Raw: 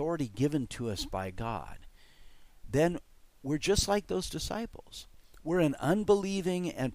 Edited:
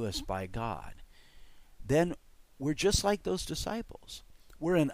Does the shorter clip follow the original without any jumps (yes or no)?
yes